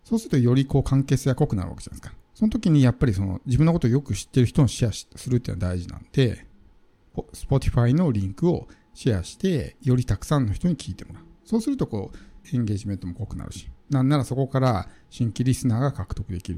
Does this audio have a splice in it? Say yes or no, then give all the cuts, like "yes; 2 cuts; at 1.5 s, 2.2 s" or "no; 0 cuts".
yes; 2 cuts; at 2.2 s, 12.4 s